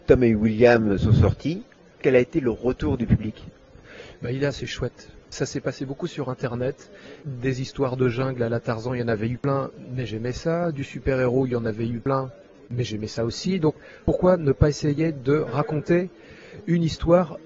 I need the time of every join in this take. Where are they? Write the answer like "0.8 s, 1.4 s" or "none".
5.2 s, 7.2 s